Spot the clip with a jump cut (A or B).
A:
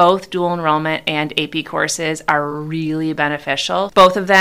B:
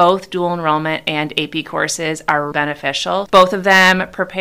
B